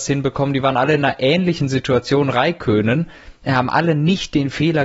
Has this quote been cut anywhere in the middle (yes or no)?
yes